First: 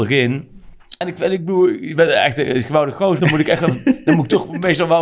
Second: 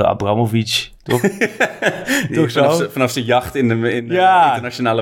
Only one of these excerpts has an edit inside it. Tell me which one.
first; 2 cuts; at 1.0 s, 3.2 s

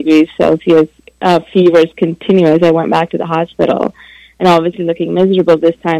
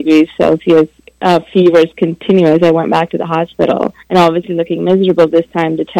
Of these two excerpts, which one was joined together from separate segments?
second; 1 cut; at 4.0 s

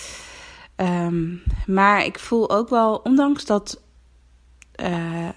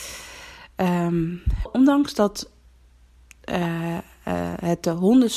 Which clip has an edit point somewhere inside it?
second; 1 cut; at 1.7 s

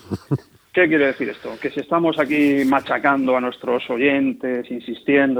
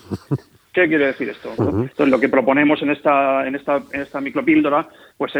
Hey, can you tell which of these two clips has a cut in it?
second; 1 cut; at 1.6 s

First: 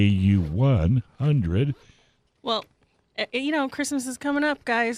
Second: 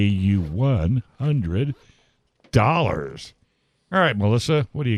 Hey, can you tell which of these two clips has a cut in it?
first; 1 cut; at 2.4 s

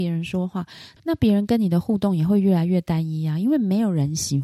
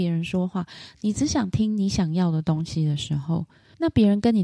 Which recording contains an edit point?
first; 1 cut; at 1.0 s

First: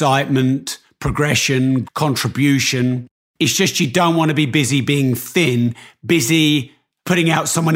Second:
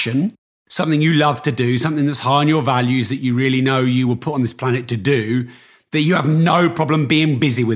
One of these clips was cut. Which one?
first; 2 cuts; at 1.8 s, 3.2 s

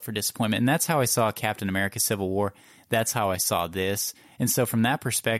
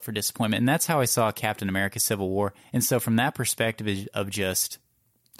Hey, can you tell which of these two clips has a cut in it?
second; 1 cut; at 2.6 s

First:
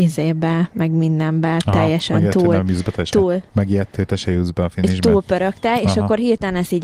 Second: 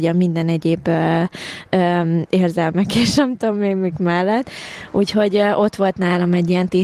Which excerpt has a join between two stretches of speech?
first; 1 cut; at 3.5 s

